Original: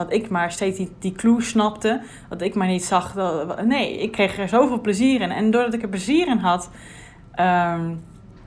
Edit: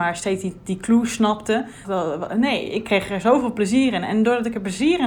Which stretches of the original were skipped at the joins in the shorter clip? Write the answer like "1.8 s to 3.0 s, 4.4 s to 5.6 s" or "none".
2.2 s to 3.1 s